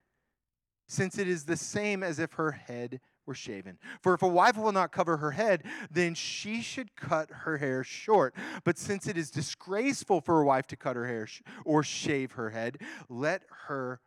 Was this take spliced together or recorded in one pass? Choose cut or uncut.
uncut